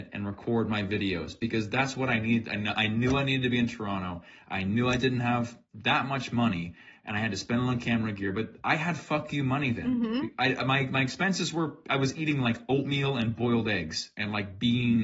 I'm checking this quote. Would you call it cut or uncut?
uncut